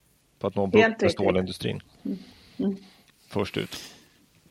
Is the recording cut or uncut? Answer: uncut